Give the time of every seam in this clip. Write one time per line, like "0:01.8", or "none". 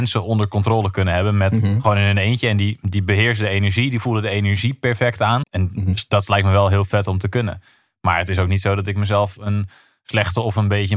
0:05.4

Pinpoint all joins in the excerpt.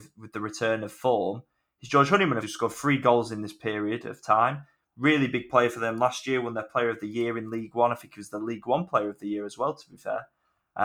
0:02.4

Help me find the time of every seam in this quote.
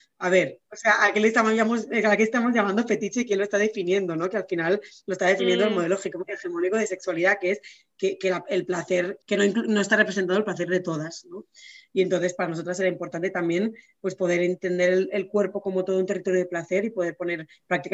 none

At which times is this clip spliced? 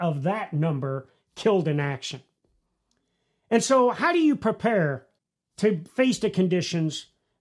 none

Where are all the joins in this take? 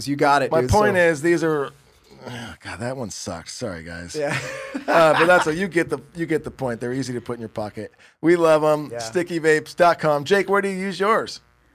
none

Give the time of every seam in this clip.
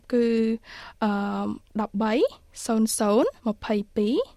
0:03.4

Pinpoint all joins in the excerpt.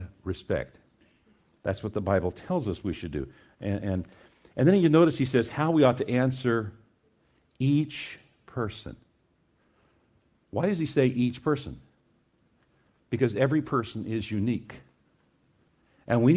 none

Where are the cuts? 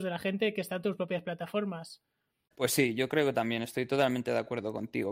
0:02.5

